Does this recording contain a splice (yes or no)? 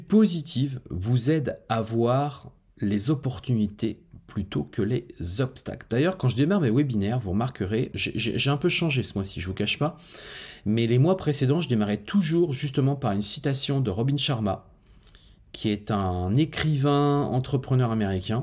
yes